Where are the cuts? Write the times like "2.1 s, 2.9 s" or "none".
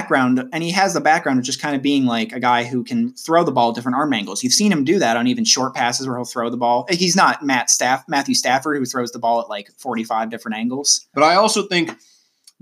11.1 s